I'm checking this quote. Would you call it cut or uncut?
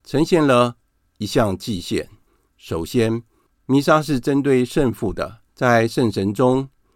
cut